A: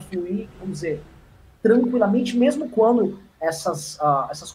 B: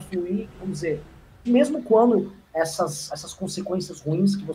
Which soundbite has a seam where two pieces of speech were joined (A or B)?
B